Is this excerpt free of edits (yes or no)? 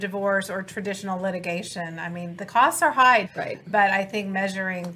no